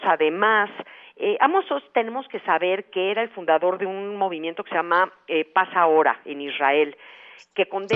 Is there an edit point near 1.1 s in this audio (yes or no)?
no